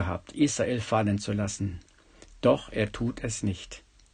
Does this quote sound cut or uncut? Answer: uncut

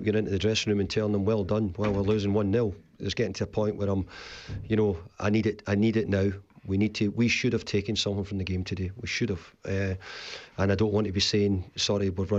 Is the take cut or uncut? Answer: uncut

